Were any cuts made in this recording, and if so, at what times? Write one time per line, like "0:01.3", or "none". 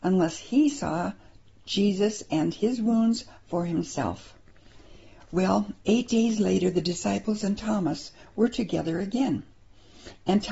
none